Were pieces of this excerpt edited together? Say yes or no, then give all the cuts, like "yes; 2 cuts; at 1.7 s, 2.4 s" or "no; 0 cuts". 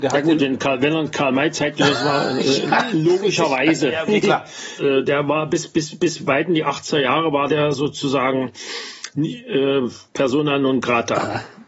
yes; 1 cut; at 4.8 s